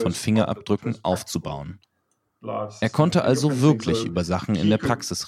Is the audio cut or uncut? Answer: uncut